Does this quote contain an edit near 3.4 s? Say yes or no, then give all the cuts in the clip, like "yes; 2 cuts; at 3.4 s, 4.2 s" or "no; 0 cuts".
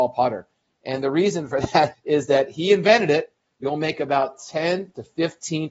yes; 2 cuts; at 1.9 s, 3.4 s